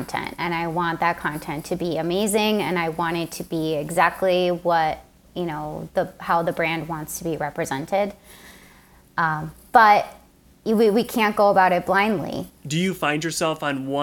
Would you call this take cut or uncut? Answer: cut